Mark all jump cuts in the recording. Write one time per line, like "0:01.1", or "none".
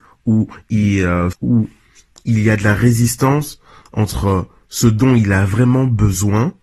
0:01.3